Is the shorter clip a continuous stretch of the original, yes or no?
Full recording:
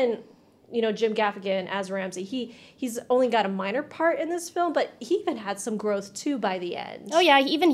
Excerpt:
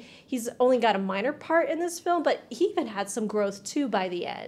yes